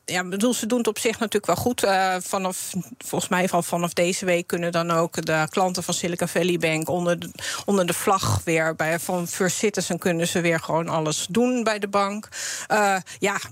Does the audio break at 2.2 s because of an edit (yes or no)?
no